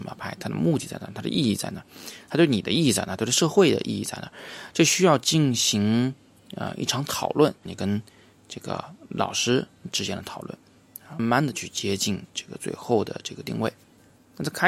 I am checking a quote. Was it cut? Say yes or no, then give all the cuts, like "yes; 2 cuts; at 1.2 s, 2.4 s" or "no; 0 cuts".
yes; 3 cuts; at 7.7 s, 11.2 s, 12.3 s